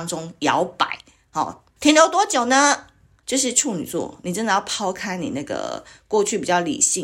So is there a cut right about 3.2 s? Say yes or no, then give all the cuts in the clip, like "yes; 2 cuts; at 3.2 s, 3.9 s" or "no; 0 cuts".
yes; 2 cuts; at 1.8 s, 3.2 s